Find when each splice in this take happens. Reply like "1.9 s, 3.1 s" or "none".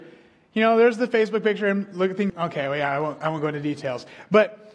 2.3 s